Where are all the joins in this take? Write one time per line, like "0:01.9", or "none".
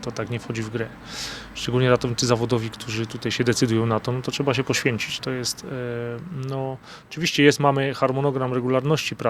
none